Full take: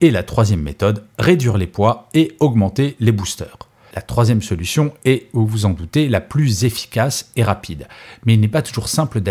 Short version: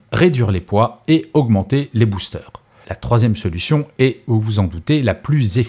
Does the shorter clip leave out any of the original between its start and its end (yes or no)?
no